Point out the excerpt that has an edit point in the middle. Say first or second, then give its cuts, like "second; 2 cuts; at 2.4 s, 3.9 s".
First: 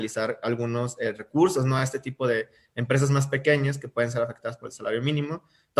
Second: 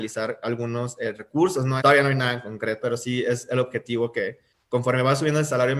second; 2 cuts; at 1.8 s, 2.8 s